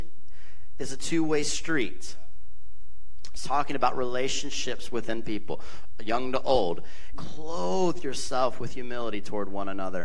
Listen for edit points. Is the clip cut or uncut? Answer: cut